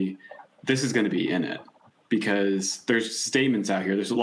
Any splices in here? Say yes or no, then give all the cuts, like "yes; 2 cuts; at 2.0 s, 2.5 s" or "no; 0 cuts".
no; 0 cuts